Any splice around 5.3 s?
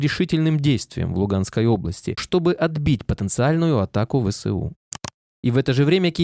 yes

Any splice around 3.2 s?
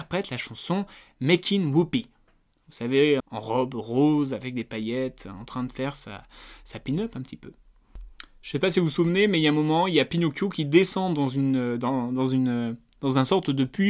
yes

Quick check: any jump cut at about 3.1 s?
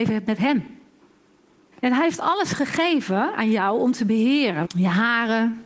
no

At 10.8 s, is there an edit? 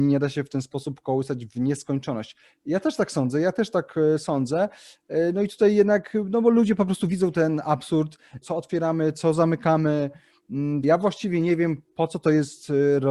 yes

